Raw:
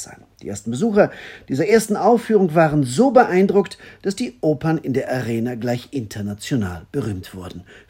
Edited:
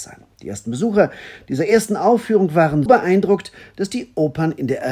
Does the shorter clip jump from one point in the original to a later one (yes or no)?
yes